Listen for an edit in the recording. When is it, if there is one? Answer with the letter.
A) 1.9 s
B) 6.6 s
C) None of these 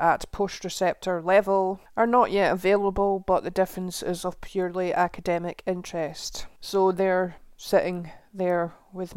B